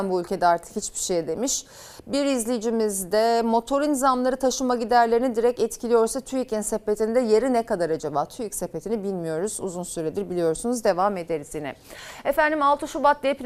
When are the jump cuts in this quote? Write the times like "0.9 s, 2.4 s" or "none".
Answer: none